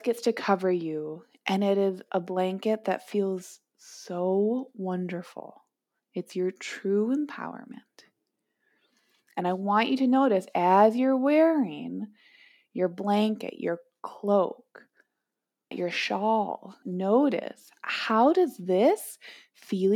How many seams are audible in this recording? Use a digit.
2